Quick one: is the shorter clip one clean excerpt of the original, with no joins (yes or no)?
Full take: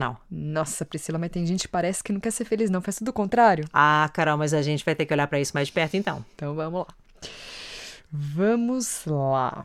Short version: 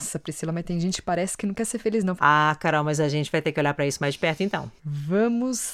no